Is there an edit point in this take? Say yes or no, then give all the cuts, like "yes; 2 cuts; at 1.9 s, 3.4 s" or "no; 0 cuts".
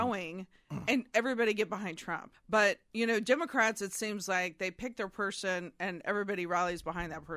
yes; 1 cut; at 2.3 s